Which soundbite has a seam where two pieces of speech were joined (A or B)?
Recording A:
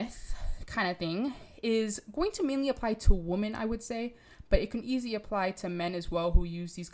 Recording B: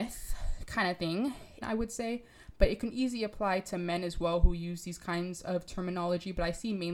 B